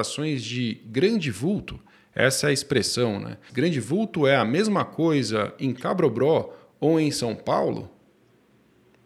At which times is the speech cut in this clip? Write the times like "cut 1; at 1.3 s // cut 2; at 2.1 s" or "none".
cut 1; at 3.5 s